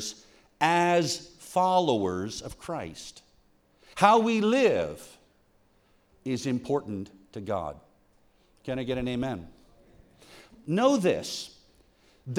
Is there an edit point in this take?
yes; 2 cuts; at 3.9 s, 6.1 s

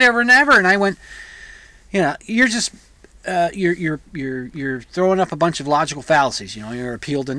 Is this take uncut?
yes; 0 cuts

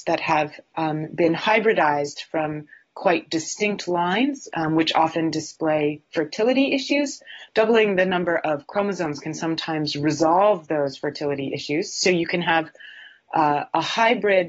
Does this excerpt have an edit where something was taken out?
no; 0 cuts

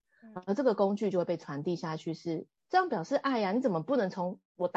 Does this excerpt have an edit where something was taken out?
no; 0 cuts

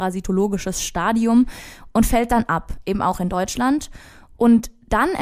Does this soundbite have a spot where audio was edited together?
no; 0 cuts

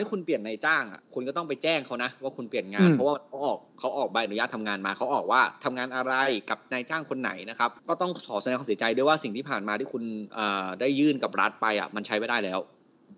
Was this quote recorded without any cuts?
no; 1 cut; at 7.8 s

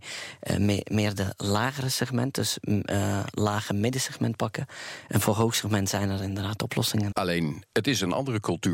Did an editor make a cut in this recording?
yes; 1 cut; at 7.1 s

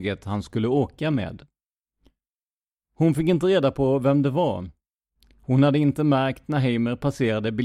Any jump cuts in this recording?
no; 0 cuts

